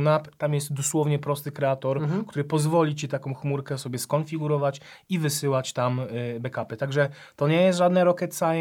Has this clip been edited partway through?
no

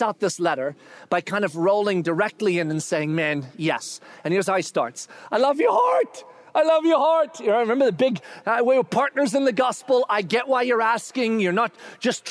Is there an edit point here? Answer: no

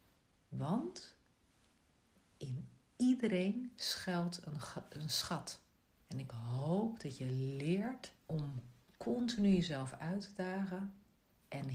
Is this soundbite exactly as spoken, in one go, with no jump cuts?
no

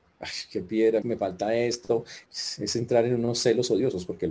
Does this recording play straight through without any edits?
no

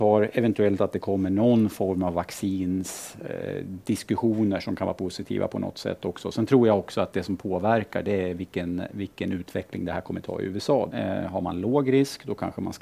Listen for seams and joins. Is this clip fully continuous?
no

